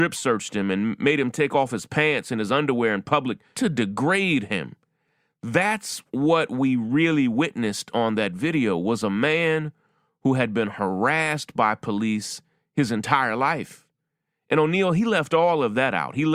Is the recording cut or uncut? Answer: cut